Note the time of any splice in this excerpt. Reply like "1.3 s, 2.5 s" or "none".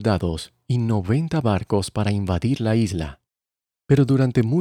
none